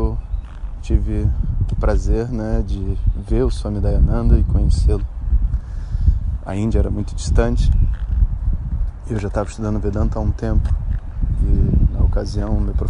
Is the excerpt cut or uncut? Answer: uncut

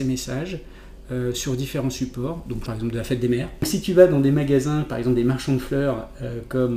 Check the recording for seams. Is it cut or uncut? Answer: cut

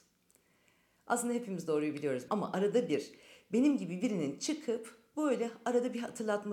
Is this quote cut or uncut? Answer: cut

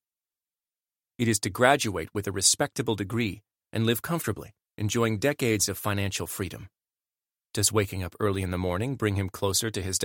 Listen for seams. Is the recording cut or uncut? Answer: cut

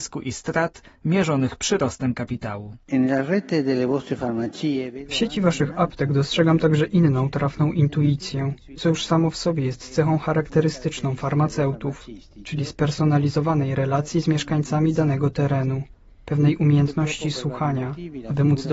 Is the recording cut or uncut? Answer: cut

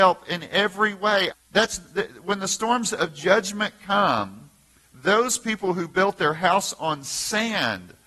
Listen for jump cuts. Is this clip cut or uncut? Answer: cut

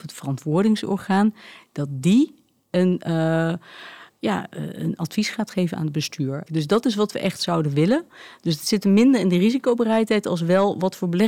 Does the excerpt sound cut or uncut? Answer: cut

